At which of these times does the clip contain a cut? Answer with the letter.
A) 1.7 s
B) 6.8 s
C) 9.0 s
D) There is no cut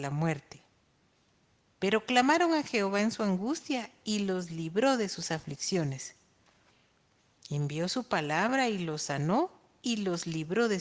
D